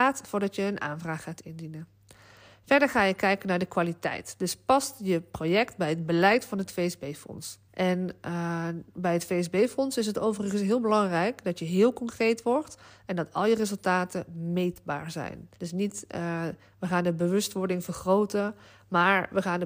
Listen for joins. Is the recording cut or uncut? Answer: cut